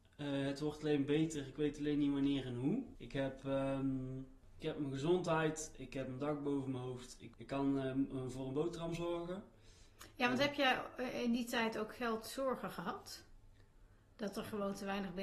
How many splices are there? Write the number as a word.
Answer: one